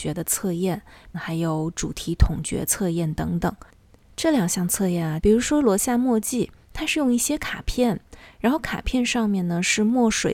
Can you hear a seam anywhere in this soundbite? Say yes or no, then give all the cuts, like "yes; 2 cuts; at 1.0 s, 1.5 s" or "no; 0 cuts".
yes; 2 cuts; at 1.1 s, 5.2 s